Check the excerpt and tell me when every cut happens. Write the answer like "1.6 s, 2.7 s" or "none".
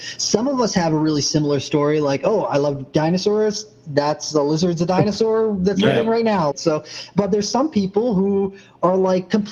6.5 s